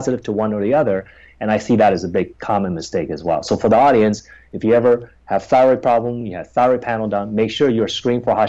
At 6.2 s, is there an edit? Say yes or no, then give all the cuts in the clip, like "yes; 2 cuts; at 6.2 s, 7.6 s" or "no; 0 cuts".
no; 0 cuts